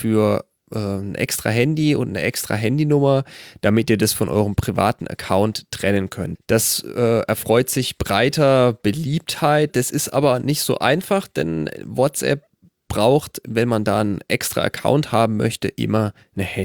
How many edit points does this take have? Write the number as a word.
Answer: two